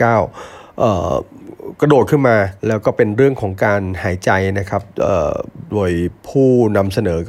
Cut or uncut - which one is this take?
cut